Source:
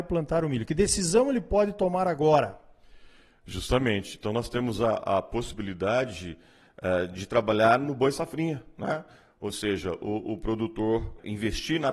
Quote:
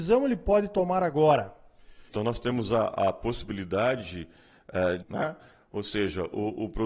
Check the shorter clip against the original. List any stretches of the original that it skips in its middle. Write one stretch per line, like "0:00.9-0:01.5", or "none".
0:03.1-0:04.2
0:07.1-0:08.7